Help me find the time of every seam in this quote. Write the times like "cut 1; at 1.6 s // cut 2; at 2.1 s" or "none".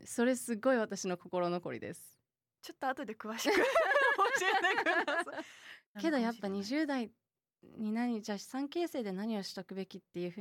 cut 1; at 5.9 s